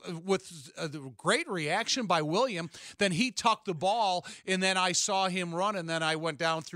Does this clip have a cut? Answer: no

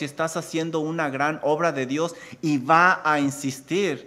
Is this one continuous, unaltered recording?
yes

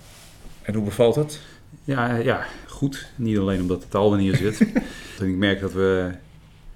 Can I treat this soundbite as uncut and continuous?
no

